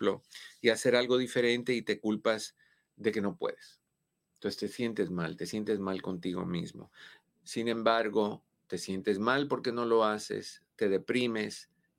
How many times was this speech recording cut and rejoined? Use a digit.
1